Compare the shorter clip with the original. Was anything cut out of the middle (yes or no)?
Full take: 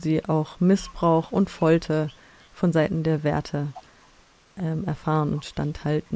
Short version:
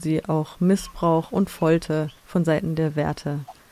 yes